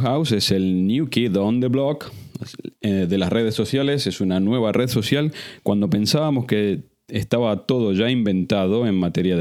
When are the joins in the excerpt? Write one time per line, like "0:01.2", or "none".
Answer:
none